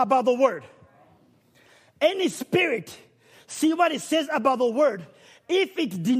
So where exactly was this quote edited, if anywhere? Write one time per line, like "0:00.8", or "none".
none